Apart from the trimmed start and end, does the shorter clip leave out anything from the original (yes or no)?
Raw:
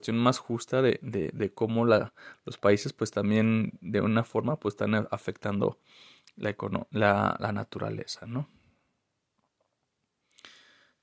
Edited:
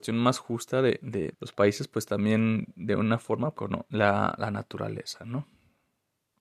yes